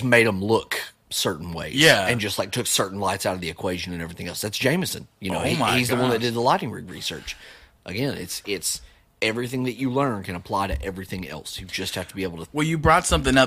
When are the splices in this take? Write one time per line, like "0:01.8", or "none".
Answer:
none